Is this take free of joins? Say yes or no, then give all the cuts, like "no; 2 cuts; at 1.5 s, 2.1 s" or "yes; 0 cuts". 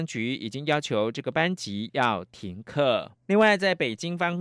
no; 1 cut; at 3.2 s